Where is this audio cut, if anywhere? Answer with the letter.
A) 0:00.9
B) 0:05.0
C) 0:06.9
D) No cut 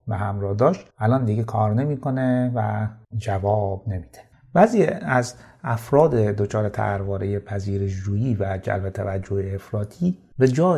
A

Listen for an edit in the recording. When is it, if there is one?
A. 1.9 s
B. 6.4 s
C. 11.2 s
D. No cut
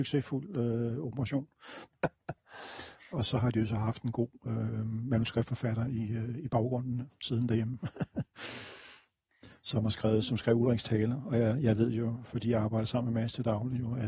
A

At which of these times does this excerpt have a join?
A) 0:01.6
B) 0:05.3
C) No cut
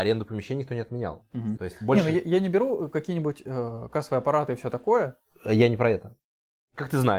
A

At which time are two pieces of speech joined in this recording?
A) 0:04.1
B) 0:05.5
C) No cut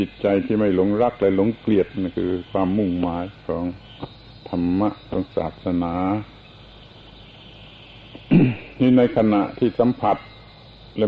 C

